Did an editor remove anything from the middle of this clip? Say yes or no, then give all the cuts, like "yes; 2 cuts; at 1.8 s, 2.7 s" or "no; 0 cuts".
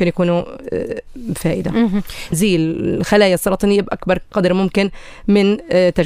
yes; 1 cut; at 2.3 s